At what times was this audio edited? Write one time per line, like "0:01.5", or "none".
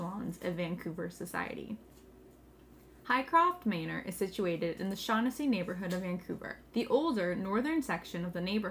0:06.7